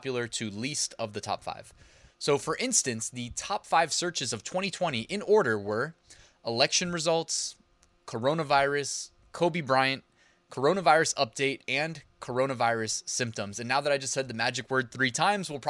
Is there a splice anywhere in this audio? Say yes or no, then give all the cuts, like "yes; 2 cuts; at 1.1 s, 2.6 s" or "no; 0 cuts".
no; 0 cuts